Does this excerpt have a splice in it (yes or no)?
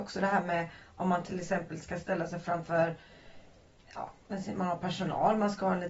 no